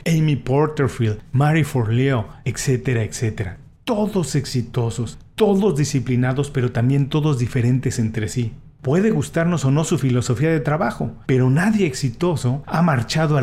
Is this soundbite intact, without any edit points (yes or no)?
no